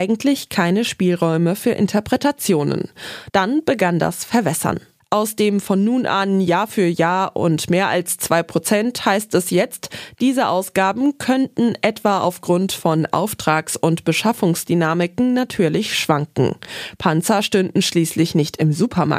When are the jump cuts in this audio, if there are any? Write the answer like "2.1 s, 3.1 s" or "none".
3.3 s